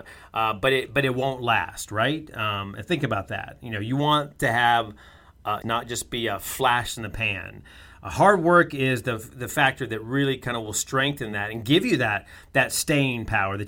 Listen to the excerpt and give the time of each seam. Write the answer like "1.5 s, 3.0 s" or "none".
5.6 s